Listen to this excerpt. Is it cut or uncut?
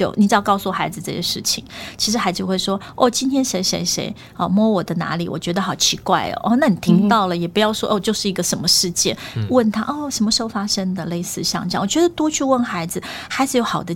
uncut